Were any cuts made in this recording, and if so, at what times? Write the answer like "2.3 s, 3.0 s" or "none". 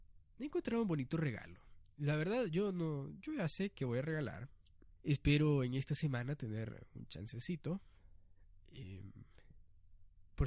5.0 s